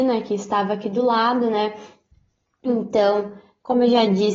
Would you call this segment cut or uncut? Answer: uncut